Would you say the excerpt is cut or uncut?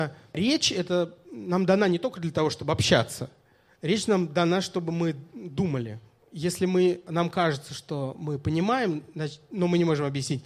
uncut